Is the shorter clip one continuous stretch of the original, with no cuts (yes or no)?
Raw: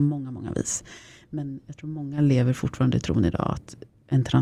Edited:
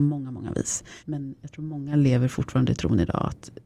no